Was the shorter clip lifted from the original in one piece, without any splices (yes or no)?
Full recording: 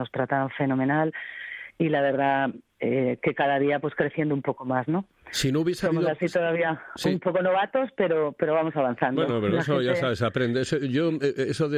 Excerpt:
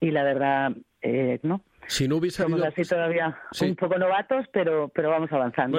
no